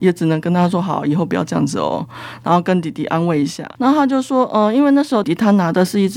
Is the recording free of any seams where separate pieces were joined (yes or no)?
no